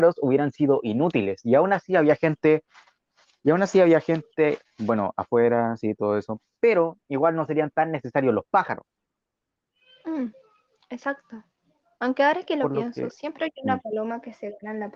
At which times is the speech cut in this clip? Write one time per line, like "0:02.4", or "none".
none